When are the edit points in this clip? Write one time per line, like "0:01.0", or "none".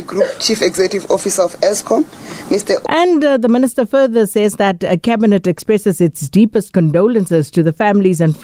0:02.8